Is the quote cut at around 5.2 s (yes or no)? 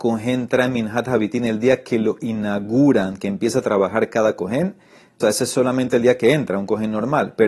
yes